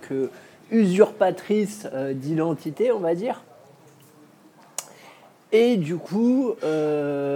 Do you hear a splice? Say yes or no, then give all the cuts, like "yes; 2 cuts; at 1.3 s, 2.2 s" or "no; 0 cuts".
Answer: no; 0 cuts